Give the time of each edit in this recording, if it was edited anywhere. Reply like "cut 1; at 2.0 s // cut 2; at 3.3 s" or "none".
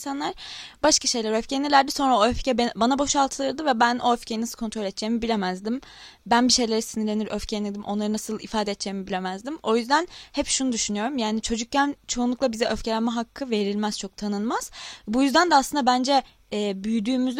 none